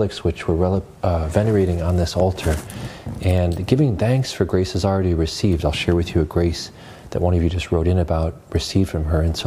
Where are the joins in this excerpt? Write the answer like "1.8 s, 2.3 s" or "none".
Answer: none